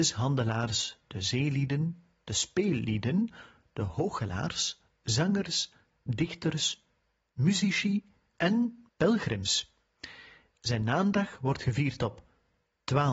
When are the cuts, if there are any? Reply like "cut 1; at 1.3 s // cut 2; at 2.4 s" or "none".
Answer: cut 1; at 8.9 s

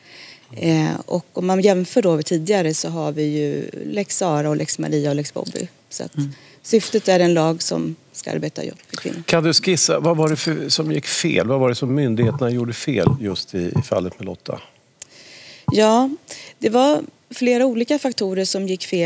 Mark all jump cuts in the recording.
none

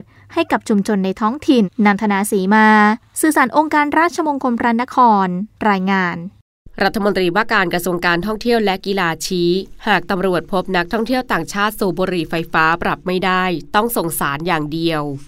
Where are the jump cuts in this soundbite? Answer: cut 1; at 1.6 s

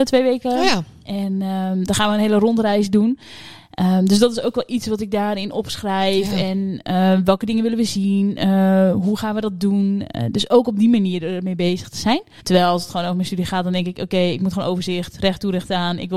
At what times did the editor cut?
cut 1; at 12.4 s

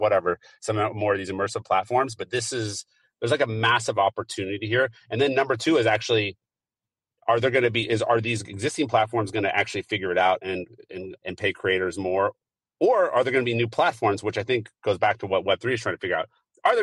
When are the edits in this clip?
cut 1; at 11.2 s

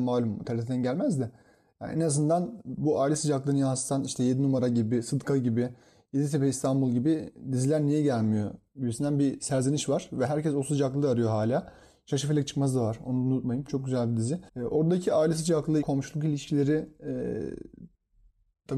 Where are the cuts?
cut 1; at 14.5 s // cut 2; at 15.8 s

